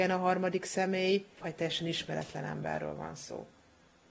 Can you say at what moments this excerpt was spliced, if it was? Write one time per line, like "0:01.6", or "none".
0:01.4